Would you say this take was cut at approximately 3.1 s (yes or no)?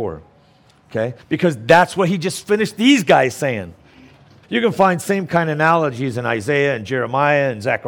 no